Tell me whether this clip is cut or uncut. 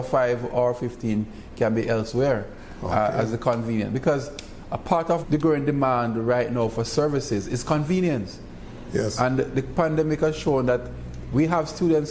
cut